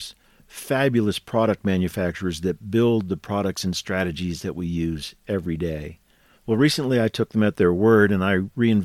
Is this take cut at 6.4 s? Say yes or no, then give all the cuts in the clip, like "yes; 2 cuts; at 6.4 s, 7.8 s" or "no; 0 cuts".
yes; 1 cut; at 6.4 s